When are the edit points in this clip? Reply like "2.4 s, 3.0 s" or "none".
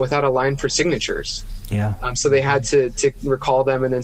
none